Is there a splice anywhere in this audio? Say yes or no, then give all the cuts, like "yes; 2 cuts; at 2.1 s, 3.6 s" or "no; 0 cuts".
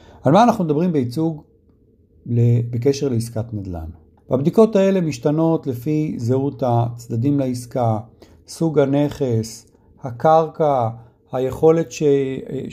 yes; 1 cut; at 4.2 s